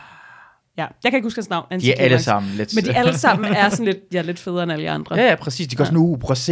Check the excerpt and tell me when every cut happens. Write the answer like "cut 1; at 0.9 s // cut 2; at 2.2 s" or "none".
none